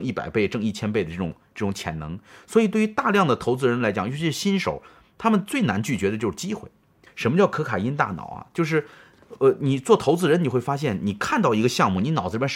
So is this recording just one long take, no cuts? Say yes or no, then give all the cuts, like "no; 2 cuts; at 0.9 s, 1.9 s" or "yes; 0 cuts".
no; 1 cut; at 7.1 s